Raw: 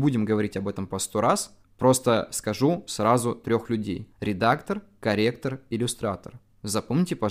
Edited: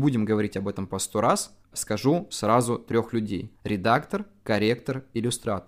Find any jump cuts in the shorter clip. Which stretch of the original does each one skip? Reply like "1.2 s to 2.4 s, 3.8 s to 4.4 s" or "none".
1.7 s to 2.3 s